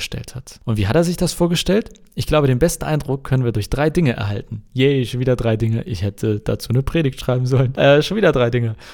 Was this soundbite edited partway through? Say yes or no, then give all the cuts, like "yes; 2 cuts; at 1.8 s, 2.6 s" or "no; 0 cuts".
no; 0 cuts